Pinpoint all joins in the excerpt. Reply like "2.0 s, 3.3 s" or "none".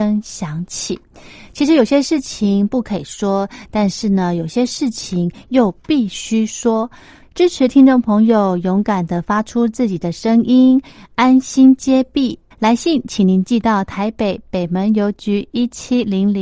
7.2 s, 12.5 s